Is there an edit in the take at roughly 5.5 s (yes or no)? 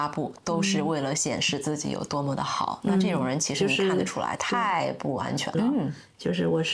yes